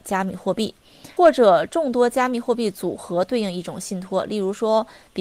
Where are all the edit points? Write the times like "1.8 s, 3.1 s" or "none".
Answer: 1.2 s